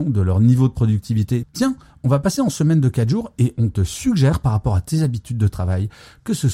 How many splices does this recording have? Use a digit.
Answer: 1